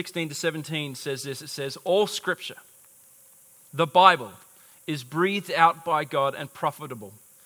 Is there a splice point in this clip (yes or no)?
no